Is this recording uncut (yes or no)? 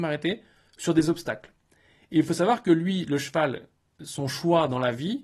yes